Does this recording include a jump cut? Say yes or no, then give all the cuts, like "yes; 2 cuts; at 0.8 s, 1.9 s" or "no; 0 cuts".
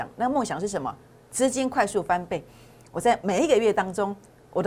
yes; 1 cut; at 2.9 s